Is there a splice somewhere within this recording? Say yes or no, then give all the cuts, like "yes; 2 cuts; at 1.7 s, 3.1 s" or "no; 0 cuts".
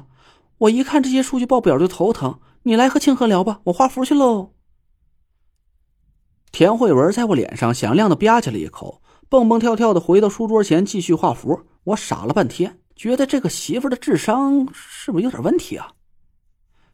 yes; 1 cut; at 12.9 s